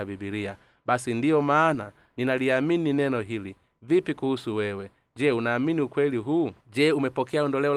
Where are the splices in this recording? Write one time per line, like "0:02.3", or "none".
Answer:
0:06.6